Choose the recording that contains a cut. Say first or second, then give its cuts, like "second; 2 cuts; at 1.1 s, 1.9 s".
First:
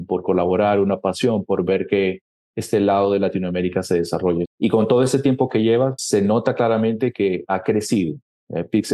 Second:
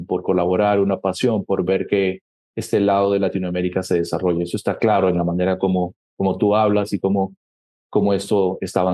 first; 2 cuts; at 4.4 s, 6.0 s